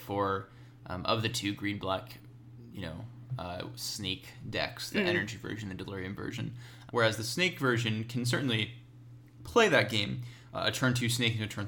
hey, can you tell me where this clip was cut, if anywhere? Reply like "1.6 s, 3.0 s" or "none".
6.9 s